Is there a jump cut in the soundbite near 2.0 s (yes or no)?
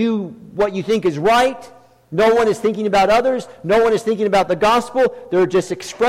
no